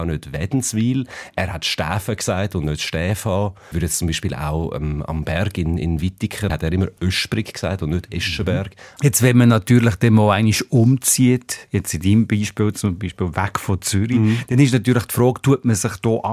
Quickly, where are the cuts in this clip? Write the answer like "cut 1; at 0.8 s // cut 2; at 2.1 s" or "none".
cut 1; at 3.7 s // cut 2; at 6.5 s // cut 3; at 9.0 s